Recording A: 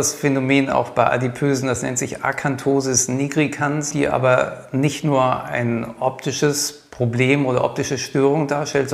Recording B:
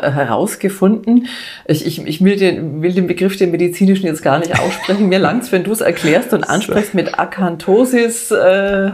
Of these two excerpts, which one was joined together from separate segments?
A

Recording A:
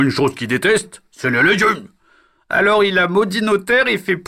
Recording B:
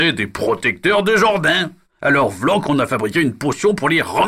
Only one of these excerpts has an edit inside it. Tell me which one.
B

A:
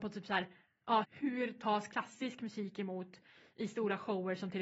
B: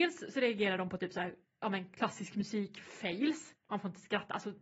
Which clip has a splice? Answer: A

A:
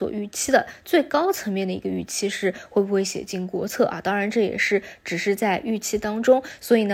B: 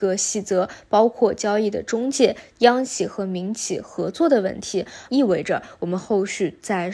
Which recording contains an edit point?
B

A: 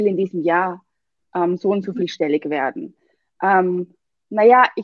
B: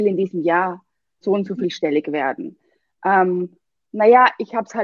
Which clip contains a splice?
B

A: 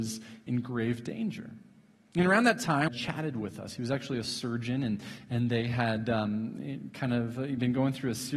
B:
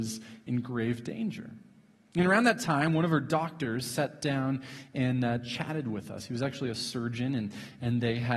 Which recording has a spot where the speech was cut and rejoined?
A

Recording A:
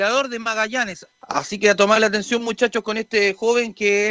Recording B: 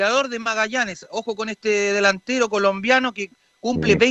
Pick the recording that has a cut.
A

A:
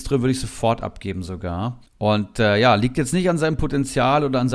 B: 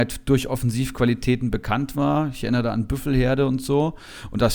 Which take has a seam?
A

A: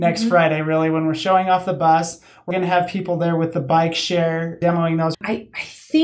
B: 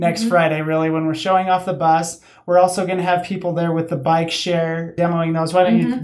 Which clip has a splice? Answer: A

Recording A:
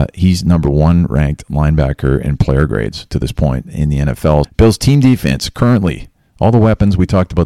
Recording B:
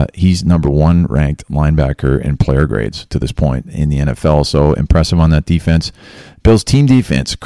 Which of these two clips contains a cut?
A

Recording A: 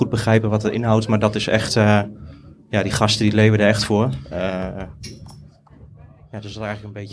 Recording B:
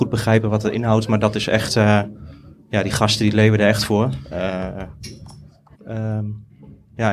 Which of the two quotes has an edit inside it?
B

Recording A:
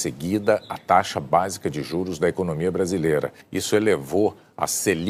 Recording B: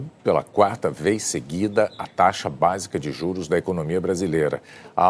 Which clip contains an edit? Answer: A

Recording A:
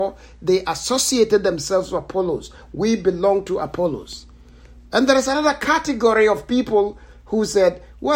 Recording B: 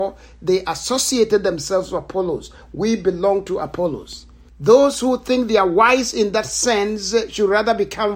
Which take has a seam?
B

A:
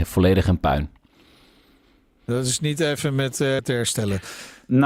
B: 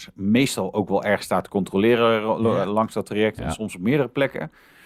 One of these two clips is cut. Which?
A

